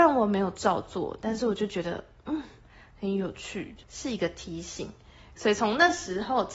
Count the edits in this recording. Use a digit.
2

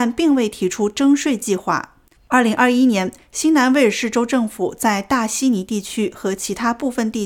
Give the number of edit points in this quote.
1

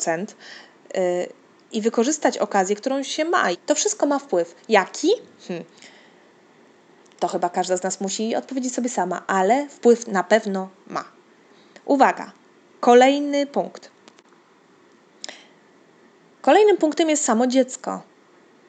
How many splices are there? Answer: 1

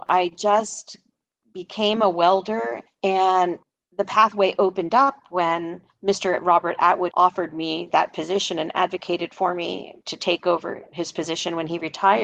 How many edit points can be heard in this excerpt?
1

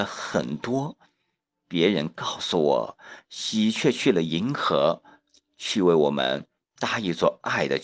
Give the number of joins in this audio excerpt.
0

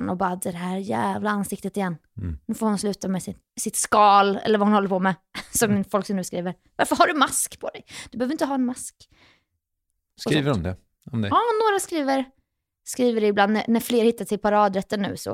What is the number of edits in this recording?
0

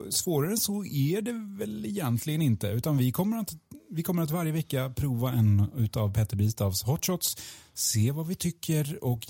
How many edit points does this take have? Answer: 0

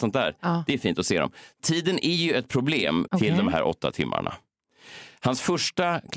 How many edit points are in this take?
1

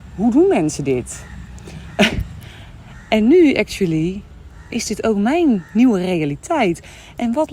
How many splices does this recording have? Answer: 0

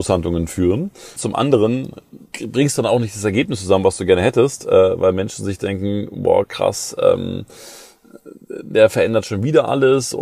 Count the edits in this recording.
1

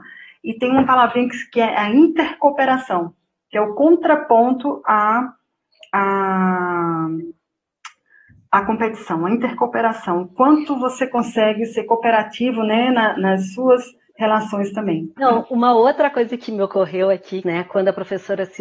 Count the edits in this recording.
2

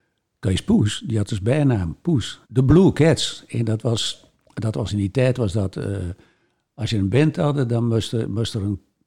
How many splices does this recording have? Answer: 1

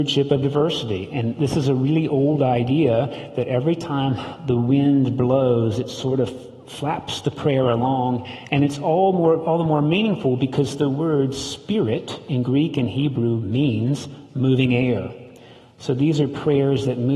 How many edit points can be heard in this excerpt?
0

